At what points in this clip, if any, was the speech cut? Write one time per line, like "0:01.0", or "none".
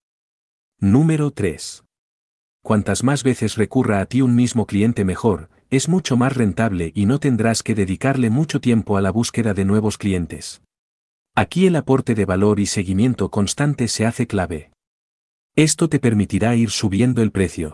0:02.6
0:11.2
0:15.5